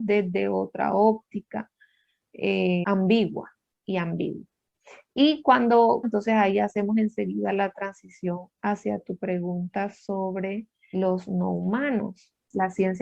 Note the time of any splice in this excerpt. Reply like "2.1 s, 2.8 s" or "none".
2.8 s, 6.0 s, 10.9 s